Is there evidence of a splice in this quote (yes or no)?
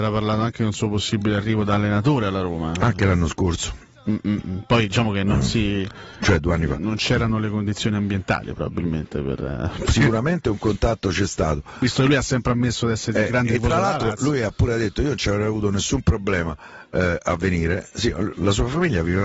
no